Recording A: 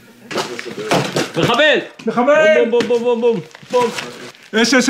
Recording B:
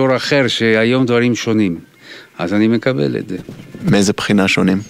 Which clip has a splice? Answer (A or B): A